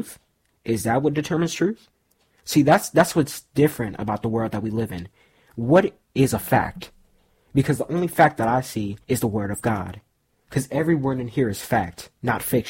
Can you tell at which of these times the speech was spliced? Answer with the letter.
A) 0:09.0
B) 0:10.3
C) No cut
A